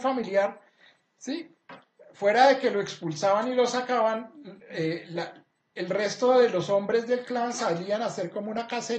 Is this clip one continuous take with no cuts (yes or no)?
yes